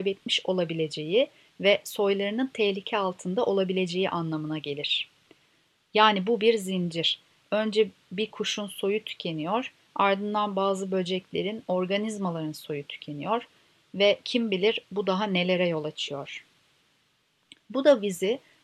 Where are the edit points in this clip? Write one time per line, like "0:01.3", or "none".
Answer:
none